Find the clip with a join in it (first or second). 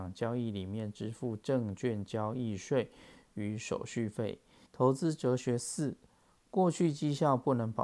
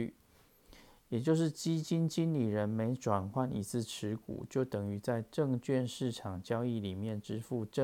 first